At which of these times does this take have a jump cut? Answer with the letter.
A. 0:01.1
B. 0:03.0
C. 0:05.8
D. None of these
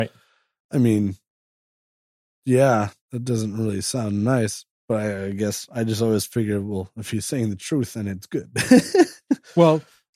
B